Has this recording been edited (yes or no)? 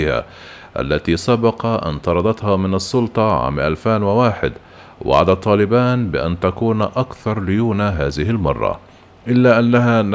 no